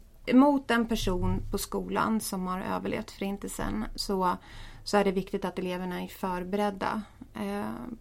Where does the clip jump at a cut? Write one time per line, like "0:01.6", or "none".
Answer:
none